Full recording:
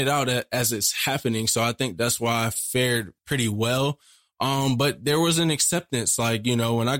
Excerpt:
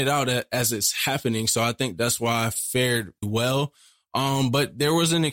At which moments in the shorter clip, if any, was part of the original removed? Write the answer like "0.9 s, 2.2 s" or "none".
3.2 s